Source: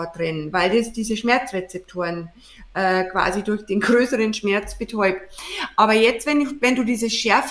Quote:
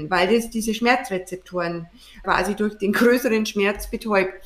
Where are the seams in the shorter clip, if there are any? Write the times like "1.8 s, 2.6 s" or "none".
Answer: 2.2 s